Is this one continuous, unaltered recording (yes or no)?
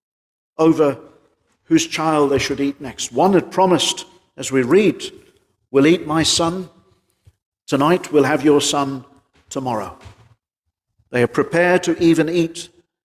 yes